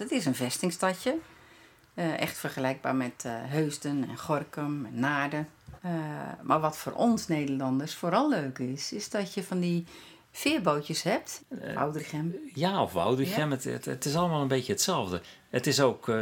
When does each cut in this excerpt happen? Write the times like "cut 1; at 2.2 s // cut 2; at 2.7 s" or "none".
cut 1; at 5.8 s // cut 2; at 11.4 s